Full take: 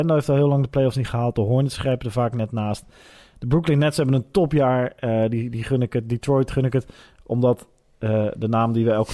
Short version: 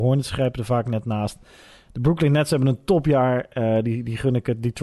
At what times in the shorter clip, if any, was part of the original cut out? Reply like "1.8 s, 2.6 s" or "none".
none